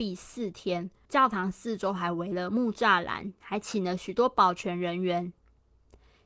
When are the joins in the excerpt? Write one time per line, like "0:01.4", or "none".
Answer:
0:01.1